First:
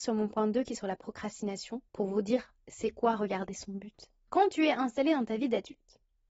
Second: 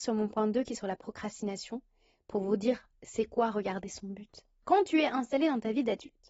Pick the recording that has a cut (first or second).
first